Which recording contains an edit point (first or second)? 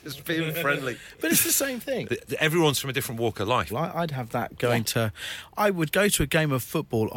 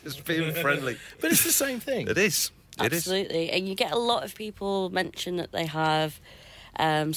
first